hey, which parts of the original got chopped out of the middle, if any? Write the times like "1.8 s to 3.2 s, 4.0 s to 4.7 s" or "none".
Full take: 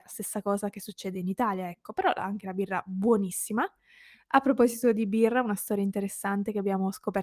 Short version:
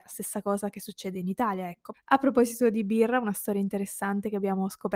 1.9 s to 4.2 s